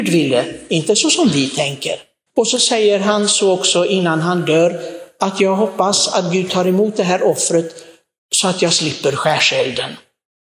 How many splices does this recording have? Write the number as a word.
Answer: one